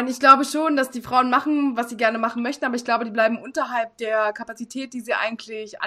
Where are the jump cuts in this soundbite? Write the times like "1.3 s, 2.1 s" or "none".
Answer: none